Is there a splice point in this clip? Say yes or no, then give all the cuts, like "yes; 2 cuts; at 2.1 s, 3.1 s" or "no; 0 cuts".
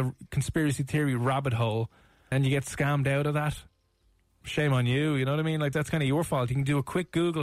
yes; 2 cuts; at 2.3 s, 5.7 s